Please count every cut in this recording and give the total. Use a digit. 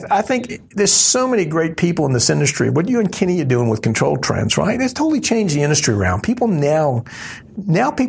0